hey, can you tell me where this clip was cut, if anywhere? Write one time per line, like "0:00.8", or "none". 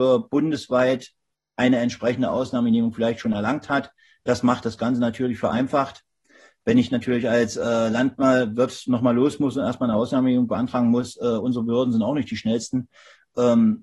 none